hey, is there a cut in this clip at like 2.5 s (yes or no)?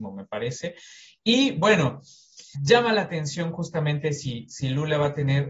yes